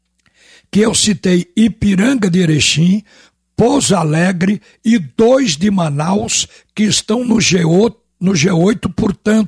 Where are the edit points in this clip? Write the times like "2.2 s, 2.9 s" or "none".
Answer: none